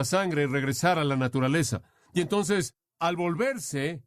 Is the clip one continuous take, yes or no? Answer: yes